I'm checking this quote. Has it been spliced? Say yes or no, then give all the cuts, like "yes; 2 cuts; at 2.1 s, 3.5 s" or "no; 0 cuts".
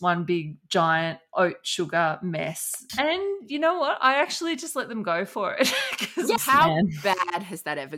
yes; 2 cuts; at 2.9 s, 6.4 s